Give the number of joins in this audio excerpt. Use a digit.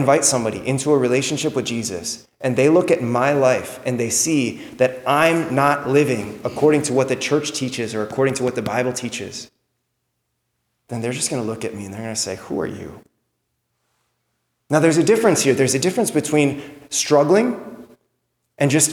0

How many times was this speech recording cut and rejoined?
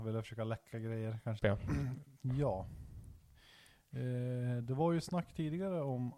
1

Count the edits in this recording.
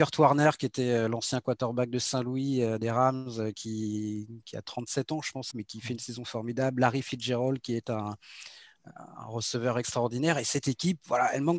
2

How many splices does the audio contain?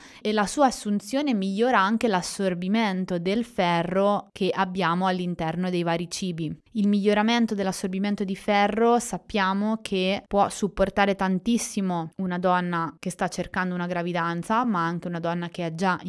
0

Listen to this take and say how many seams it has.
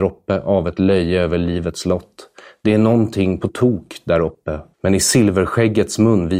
1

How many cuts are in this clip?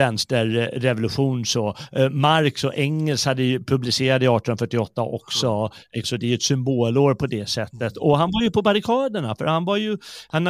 1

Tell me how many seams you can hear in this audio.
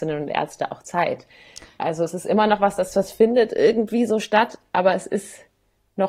0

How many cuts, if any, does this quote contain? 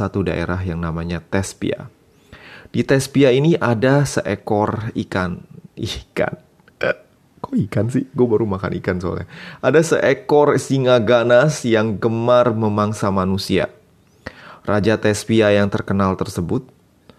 0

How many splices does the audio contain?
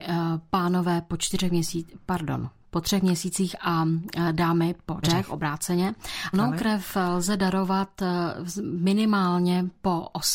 2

